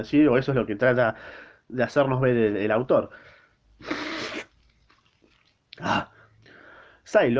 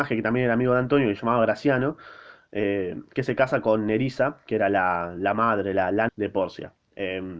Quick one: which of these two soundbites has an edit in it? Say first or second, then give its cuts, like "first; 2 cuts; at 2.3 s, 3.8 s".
second; 1 cut; at 6.1 s